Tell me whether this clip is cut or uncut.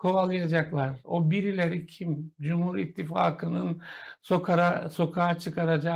uncut